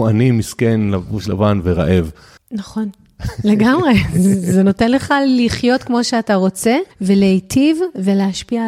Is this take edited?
yes; 2 cuts; at 2.4 s, 6.9 s

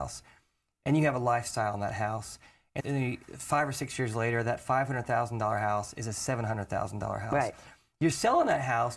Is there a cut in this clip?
yes; 1 cut; at 2.8 s

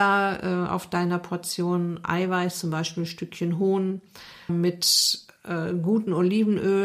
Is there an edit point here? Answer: yes; 1 cut; at 4.5 s

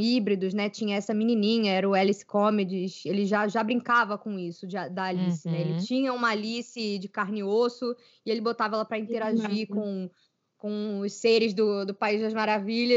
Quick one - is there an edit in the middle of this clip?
no; 0 cuts

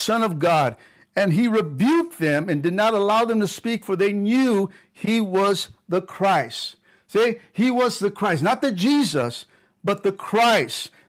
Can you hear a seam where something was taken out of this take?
no; 0 cuts

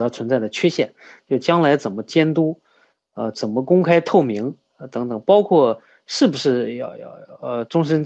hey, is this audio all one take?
yes; 0 cuts

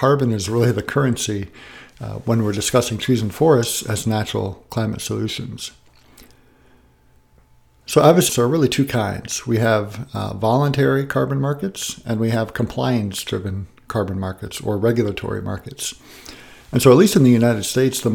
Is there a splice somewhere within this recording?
yes; 1 cut; at 8.3 s

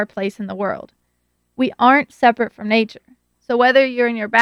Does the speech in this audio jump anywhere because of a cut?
no; 0 cuts

